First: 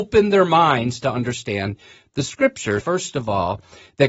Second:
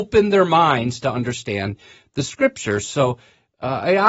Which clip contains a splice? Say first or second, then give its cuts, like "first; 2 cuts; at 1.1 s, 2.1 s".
first; 1 cut; at 2.8 s